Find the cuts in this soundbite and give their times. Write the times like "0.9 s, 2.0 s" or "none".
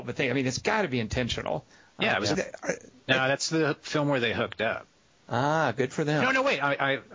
2.3 s